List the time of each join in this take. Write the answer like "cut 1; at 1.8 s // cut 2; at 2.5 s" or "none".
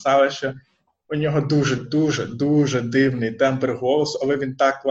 cut 1; at 1.8 s

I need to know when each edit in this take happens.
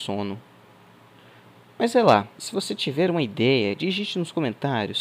cut 1; at 2.4 s

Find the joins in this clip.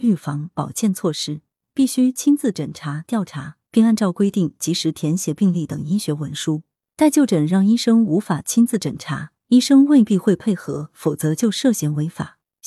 cut 1; at 1.6 s

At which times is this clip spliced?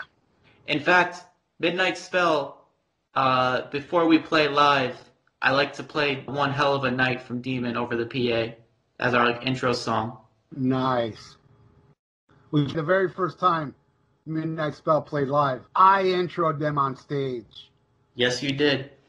cut 1; at 6.3 s // cut 2; at 12.7 s // cut 3; at 15.7 s

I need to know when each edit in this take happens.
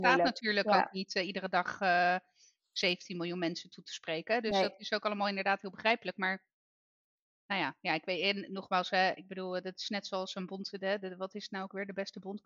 none

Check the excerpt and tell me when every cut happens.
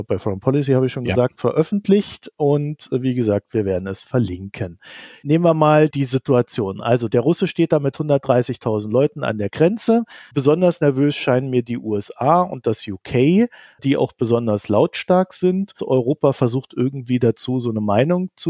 cut 1; at 5.9 s // cut 2; at 15.8 s

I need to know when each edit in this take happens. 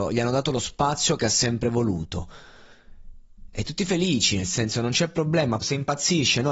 cut 1; at 3.7 s // cut 2; at 5.6 s

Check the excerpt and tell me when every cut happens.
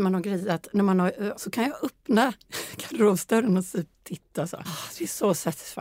cut 1; at 1.3 s // cut 2; at 4.6 s

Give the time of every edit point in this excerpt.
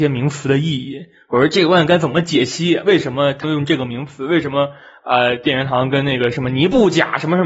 cut 1; at 3.4 s

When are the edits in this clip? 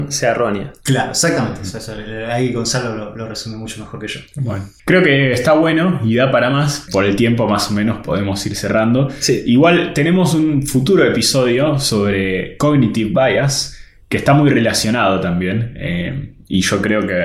cut 1; at 6.9 s

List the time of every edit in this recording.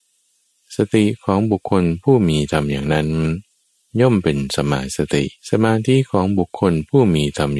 cut 1; at 5.4 s

